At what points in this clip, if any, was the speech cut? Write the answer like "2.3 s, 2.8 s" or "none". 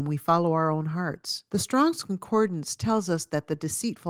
1.5 s